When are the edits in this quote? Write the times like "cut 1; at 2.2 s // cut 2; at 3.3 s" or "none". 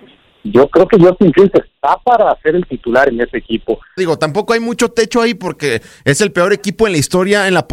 cut 1; at 4.0 s